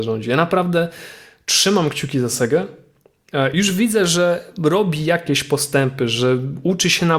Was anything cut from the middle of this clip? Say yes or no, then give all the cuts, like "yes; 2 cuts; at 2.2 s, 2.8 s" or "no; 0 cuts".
no; 0 cuts